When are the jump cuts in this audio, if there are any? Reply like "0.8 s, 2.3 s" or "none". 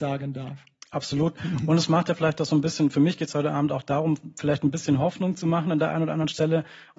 none